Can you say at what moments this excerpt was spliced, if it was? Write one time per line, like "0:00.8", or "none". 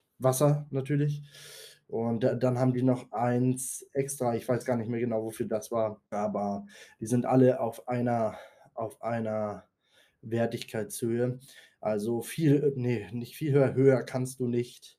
0:06.1